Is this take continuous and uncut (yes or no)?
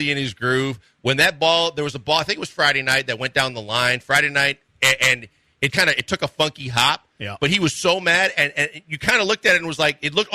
no